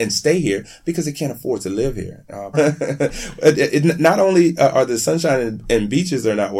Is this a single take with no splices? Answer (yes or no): no